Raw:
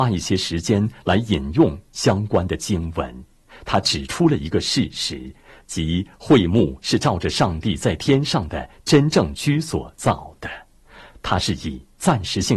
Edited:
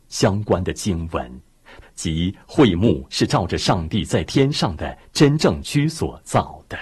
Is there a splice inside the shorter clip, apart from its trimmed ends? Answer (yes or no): yes